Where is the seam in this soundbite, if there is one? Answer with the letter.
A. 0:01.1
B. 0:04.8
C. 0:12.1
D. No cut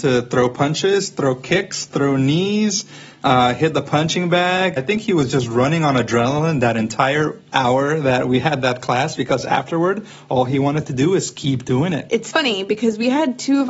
B